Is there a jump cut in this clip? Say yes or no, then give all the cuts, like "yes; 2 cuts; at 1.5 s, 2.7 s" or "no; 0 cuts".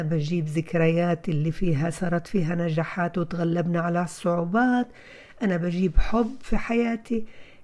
no; 0 cuts